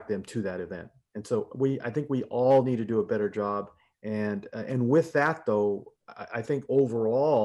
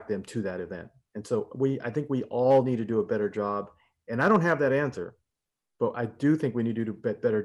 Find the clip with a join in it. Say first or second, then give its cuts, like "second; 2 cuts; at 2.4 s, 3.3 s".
first; 1 cut; at 3.9 s